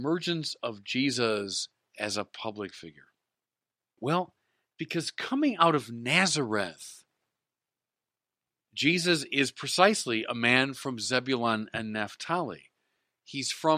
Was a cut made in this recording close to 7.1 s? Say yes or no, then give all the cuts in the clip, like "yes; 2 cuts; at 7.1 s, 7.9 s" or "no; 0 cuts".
no; 1 cut; at 4.0 s